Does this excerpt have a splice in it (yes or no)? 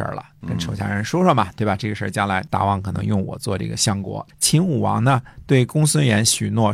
yes